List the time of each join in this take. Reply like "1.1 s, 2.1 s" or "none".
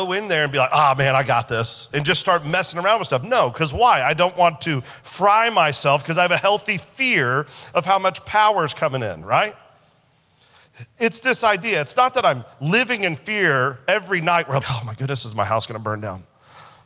14.6 s